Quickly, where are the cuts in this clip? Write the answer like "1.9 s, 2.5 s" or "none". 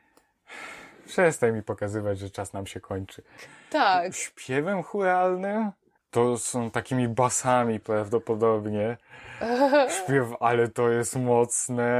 3.4 s, 6.0 s, 7.8 s